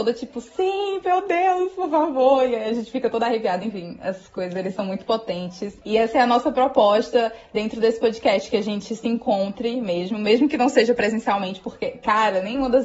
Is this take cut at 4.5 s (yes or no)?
yes